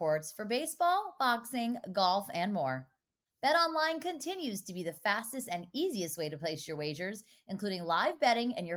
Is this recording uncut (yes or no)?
yes